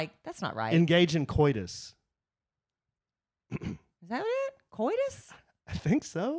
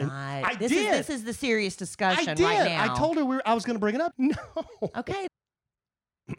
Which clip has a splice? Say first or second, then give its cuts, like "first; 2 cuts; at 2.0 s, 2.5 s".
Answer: second; 2 cuts; at 4.1 s, 5.3 s